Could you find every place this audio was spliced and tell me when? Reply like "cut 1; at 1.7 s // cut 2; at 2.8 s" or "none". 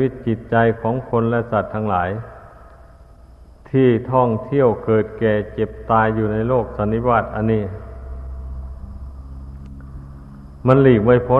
none